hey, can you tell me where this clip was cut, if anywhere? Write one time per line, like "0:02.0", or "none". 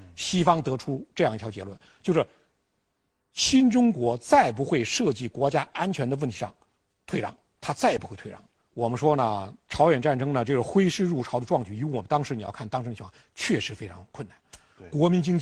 0:08.6